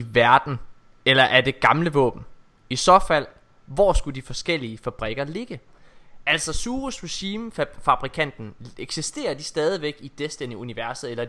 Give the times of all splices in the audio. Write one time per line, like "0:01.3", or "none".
none